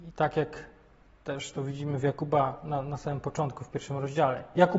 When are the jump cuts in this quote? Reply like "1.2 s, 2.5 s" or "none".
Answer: none

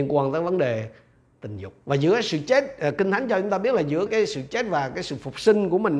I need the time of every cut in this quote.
1.8 s, 4.1 s

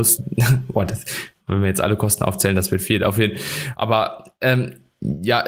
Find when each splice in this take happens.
none

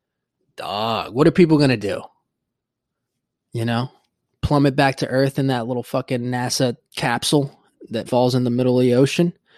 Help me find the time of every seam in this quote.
6.9 s, 8.1 s

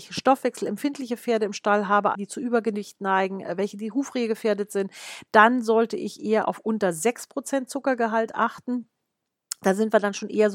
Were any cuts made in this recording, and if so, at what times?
2.1 s

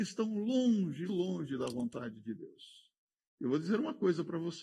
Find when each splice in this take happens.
1.1 s

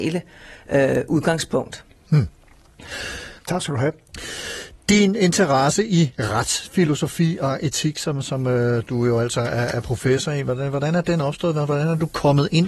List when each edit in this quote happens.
3.4 s

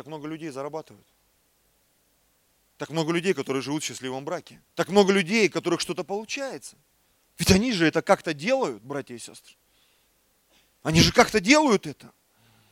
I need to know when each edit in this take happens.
4.7 s, 7.2 s

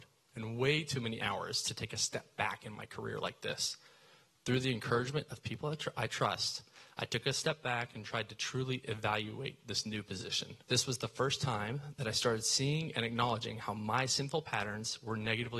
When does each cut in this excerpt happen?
10.6 s

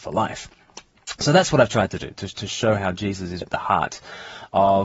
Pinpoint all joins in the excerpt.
3.4 s

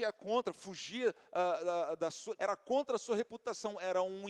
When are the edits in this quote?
2.4 s

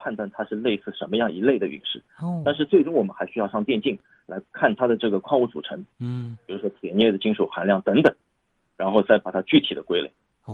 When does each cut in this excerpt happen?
none

